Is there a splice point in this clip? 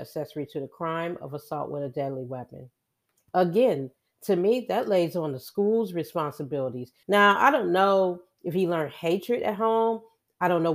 yes; 2 cuts; at 3.2 s, 7.0 s

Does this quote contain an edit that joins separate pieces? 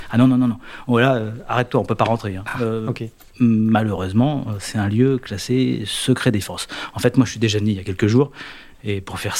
no; 0 cuts

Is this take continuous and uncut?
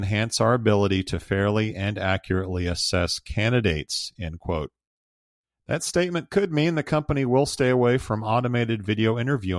yes; 0 cuts

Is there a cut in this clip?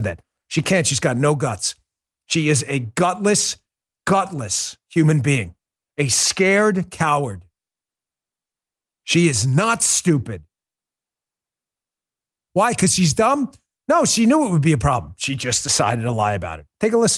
yes; 1 cut; at 12.5 s

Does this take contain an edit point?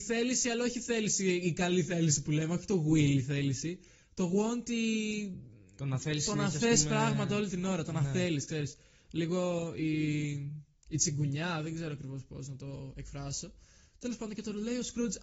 no; 0 cuts

